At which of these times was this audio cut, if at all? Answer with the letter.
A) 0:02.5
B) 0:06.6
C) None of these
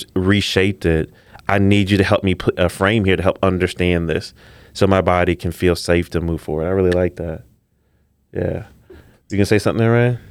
A